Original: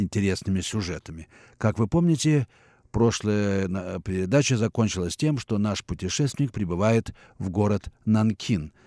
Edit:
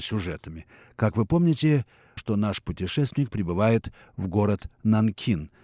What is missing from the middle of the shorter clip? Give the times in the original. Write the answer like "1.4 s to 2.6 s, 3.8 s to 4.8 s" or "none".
2.8 s to 5.4 s